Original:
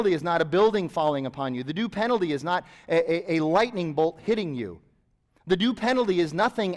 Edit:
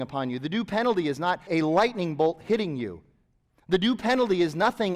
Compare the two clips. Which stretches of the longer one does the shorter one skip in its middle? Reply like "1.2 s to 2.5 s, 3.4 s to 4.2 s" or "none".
2.7 s to 3.3 s